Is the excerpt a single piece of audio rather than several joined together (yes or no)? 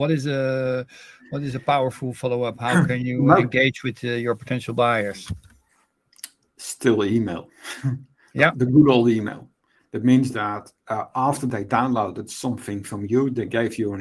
yes